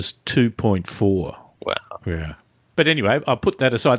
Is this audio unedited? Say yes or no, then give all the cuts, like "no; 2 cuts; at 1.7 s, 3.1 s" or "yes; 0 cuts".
no; 1 cut; at 1.6 s